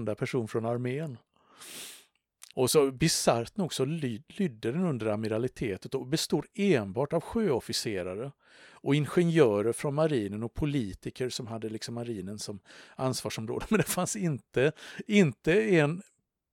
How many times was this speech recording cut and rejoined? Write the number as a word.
one